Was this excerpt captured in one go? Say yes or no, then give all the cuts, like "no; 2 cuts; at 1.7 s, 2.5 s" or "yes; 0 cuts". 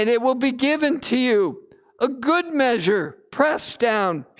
yes; 0 cuts